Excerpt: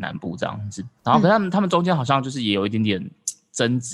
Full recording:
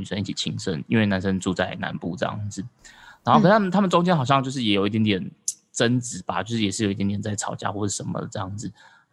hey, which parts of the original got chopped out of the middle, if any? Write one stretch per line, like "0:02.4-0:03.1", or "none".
0:02.8-0:03.2